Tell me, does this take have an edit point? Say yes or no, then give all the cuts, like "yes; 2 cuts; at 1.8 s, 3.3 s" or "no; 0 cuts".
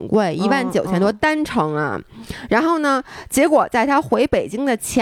no; 0 cuts